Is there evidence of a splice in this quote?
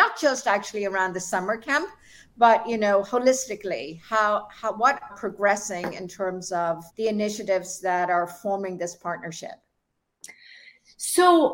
yes; 2 cuts; at 5.1 s, 6.9 s

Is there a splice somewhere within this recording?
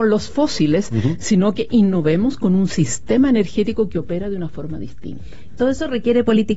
no; 0 cuts

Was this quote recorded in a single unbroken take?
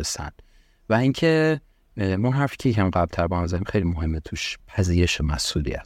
no; 1 cut; at 4.6 s

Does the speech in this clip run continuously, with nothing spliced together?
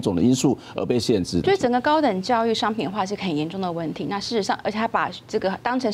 no; 1 cut; at 1.4 s

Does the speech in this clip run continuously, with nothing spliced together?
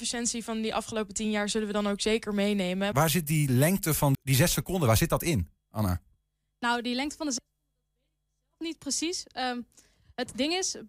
no; 2 cuts; at 2.9 s, 4.1 s

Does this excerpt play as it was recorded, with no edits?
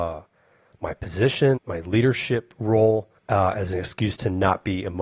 no; 2 cuts; at 1.6 s, 3.2 s

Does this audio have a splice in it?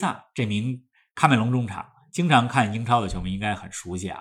no; 0 cuts

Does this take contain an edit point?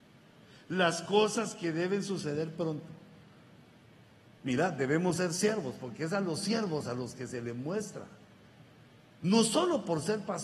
no; 0 cuts

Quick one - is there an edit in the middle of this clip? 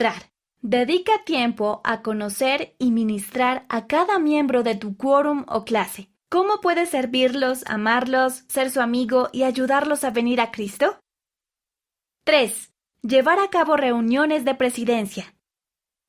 yes; 1 cut; at 6.2 s

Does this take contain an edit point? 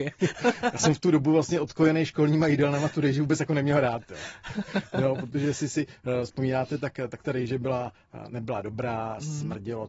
no; 0 cuts

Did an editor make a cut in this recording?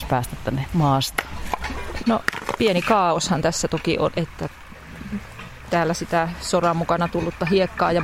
yes; 2 cuts; at 2.0 s, 4.1 s

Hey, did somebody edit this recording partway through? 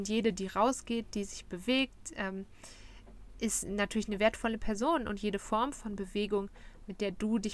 no; 0 cuts

